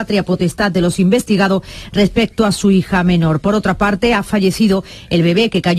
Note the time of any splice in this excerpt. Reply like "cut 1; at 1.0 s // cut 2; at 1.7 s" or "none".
none

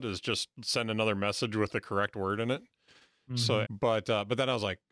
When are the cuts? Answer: cut 1; at 3.6 s

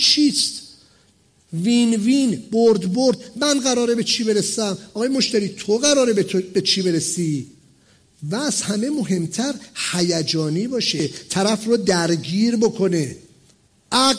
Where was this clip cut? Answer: none

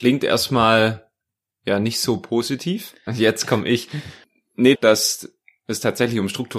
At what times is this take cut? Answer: cut 1; at 3.1 s // cut 2; at 4.7 s

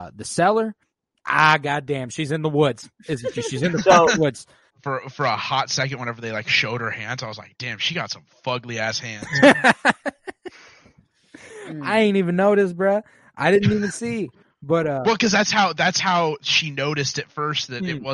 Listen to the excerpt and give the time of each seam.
cut 1; at 4.7 s

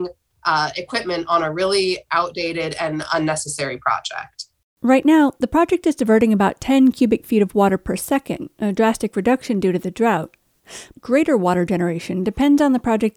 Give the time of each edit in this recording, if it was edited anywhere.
none

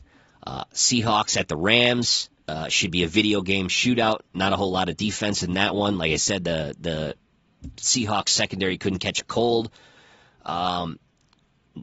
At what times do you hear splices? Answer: none

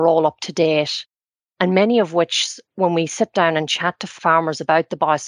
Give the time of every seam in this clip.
cut 1; at 1.4 s

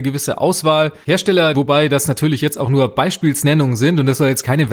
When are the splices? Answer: cut 1; at 1.5 s

